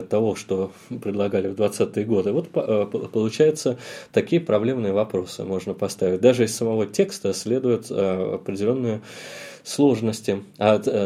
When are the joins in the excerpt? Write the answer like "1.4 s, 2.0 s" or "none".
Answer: none

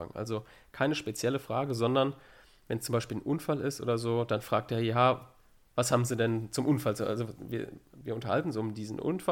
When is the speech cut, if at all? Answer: none

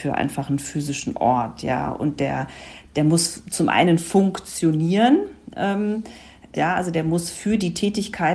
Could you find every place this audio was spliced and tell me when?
6.5 s

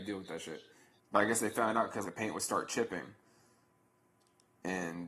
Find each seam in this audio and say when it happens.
1.0 s, 2.0 s

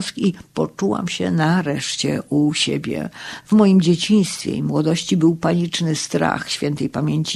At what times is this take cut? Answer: 3.4 s

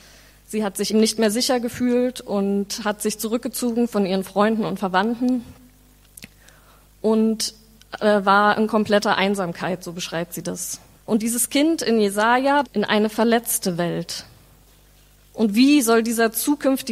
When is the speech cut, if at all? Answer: 0.9 s, 11.0 s, 12.6 s

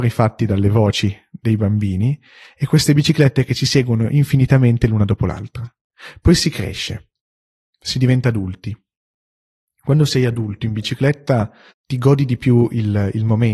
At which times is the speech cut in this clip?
11.7 s

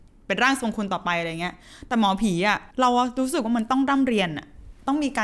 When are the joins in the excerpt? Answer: 2.7 s

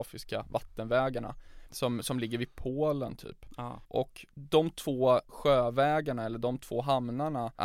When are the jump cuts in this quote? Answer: 1.7 s

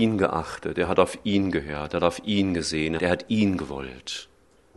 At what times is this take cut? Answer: 3.0 s

